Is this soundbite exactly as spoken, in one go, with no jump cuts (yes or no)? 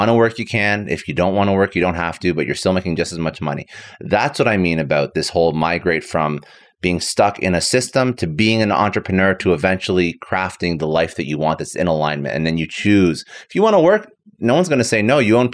yes